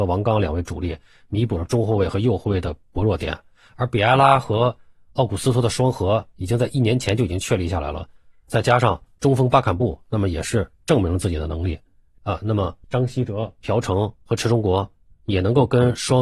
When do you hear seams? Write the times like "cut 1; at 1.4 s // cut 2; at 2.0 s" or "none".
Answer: none